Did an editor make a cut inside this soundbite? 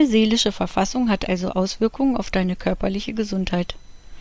no; 0 cuts

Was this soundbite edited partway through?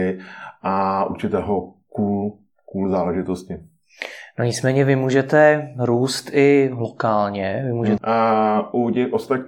yes; 1 cut; at 8.0 s

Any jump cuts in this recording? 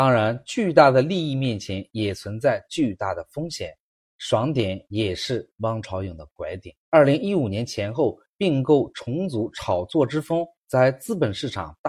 yes; 1 cut; at 6.8 s

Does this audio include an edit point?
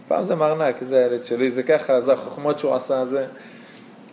yes; 1 cut; at 2.0 s

